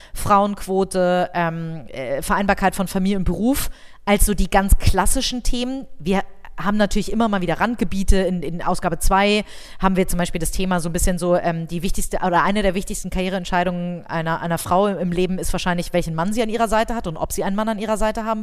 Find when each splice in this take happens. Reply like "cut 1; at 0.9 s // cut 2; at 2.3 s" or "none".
none